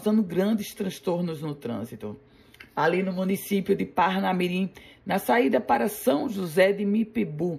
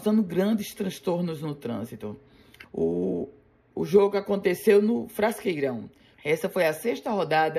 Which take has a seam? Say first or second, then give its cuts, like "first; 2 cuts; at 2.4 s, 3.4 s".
second; 2 cuts; at 2.6 s, 6.1 s